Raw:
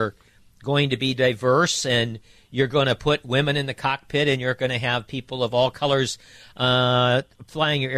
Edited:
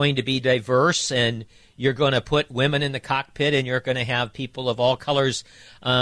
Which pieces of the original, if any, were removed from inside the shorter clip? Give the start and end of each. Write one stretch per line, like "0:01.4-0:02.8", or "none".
none